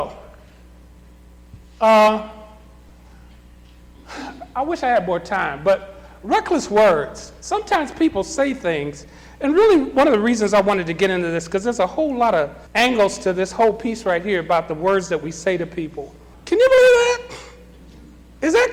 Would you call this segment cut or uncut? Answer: cut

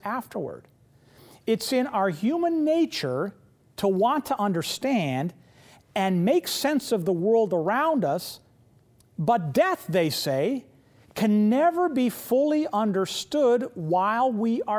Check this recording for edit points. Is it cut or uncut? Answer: uncut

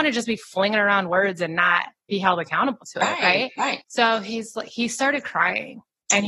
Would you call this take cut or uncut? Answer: cut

